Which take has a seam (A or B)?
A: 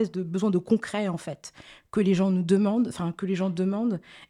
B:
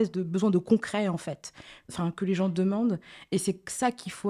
B